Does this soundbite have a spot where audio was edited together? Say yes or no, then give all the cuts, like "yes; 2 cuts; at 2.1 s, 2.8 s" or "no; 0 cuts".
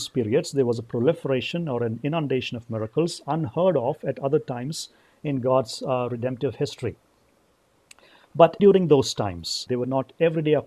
yes; 2 cuts; at 8.6 s, 9.7 s